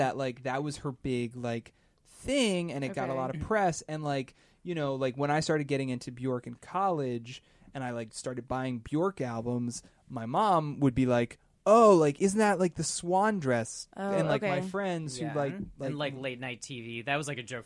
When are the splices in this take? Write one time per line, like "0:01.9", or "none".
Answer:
none